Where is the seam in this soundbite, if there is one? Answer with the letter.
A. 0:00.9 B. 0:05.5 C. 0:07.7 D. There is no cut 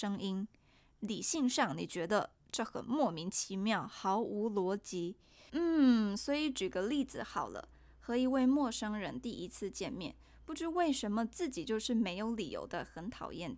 B